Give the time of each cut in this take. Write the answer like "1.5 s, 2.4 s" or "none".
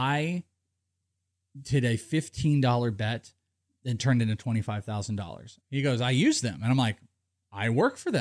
5.6 s